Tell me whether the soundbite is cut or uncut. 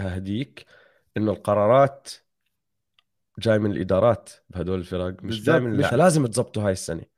cut